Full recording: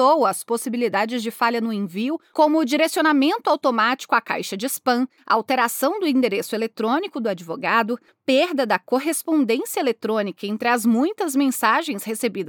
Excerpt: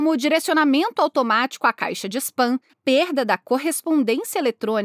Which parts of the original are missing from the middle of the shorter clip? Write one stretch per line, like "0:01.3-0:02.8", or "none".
0:05.2-0:08.1